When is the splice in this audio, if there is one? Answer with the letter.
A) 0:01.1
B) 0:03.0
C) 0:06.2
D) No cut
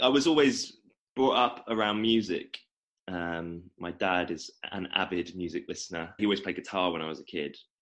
C